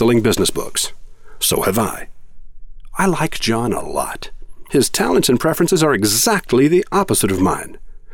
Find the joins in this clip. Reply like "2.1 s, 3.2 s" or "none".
none